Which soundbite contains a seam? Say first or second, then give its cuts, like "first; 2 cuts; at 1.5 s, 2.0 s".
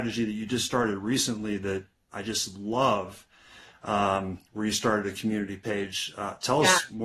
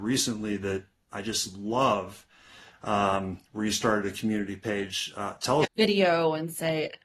second; 1 cut; at 5.6 s